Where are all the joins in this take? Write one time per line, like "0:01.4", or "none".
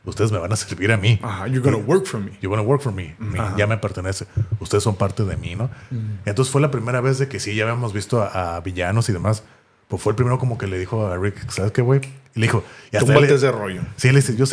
0:03.3